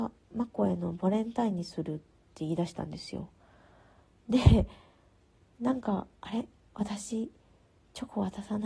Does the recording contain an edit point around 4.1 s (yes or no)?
no